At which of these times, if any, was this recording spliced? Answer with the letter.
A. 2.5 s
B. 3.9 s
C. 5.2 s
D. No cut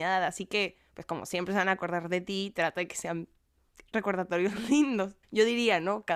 C